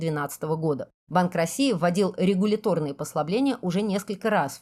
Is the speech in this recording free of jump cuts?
no; 1 cut; at 1.0 s

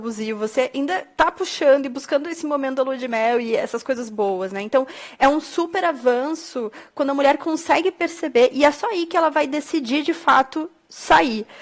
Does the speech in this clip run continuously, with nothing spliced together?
yes; 0 cuts

